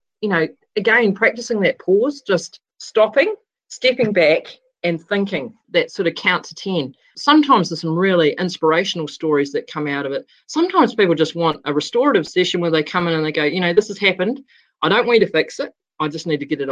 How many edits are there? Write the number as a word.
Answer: zero